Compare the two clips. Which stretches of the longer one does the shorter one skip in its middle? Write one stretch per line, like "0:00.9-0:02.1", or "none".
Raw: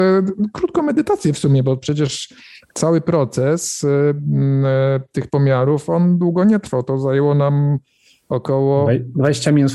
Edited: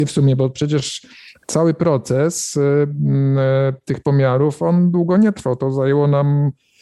none